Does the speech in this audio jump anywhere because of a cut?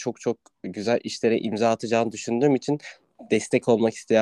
no; 0 cuts

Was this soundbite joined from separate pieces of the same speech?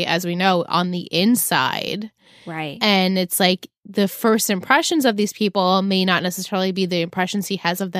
no; 0 cuts

